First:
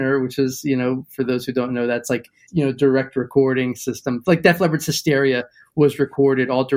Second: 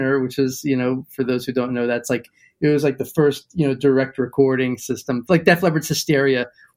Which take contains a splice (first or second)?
first